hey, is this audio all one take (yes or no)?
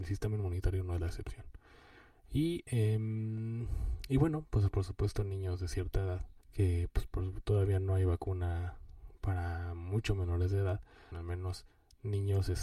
no